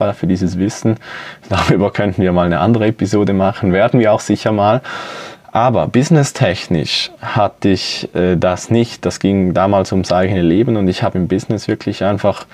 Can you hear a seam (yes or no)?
no